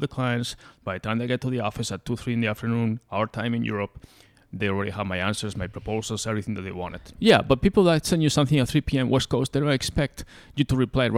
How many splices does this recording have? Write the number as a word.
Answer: one